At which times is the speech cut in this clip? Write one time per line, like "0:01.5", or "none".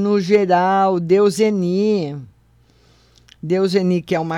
none